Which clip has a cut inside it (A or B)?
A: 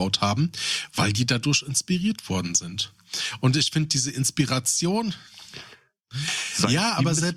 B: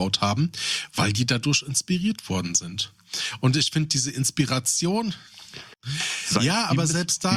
B